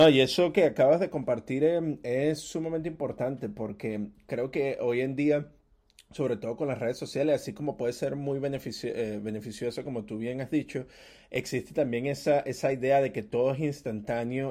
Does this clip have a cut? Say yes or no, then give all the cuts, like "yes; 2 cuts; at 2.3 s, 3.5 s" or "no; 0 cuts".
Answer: no; 0 cuts